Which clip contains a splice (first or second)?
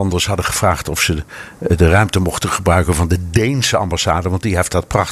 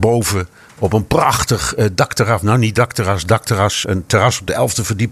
second